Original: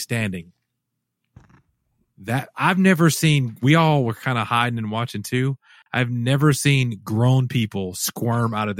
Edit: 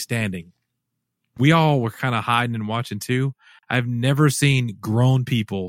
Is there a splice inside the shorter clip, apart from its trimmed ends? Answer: yes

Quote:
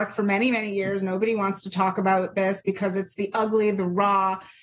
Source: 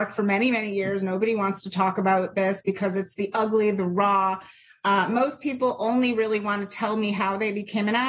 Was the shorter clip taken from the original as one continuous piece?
yes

